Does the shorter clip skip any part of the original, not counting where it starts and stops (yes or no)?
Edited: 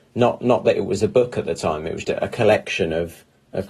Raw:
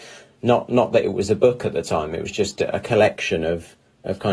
yes